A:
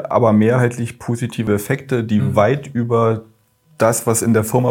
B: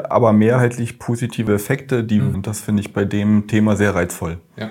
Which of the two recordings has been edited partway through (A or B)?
B